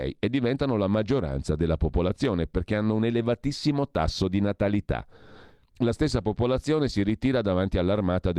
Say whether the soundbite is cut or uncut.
cut